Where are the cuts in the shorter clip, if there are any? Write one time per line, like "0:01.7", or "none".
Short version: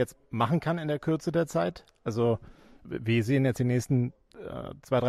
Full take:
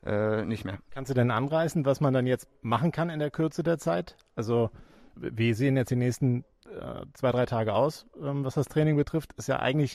none